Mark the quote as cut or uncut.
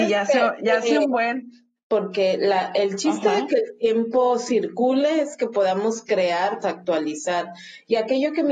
cut